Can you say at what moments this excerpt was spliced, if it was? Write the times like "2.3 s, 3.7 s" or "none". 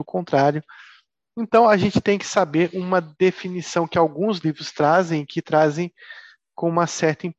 1.2 s